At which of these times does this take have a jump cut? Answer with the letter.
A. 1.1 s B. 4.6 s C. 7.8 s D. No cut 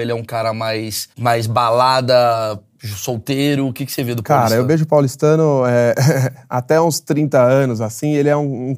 A